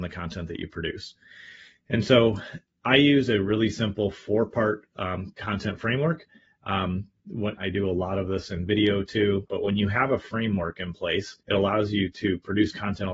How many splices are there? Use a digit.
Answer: 3